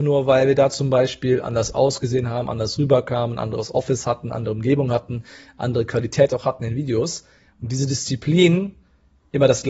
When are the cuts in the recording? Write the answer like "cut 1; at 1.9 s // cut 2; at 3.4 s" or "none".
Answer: cut 1; at 7.5 s